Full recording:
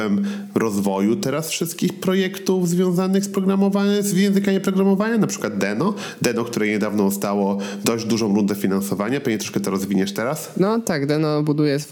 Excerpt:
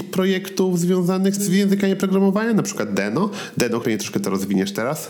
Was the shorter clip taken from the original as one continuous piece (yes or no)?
no